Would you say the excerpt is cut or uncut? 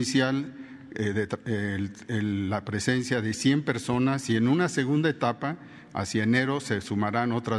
uncut